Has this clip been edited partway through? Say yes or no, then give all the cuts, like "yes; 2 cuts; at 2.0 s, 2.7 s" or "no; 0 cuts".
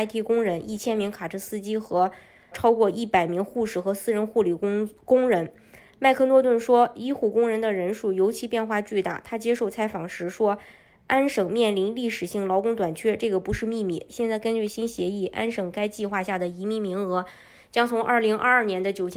yes; 2 cuts; at 2.5 s, 14.1 s